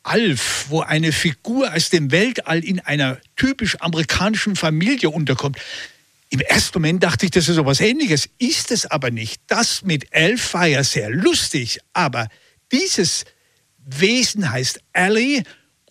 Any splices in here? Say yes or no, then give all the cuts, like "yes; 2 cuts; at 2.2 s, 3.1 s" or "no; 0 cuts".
no; 0 cuts